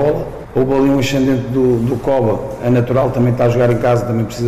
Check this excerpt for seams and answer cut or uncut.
uncut